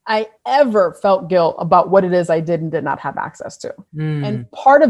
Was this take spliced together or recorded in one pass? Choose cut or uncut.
cut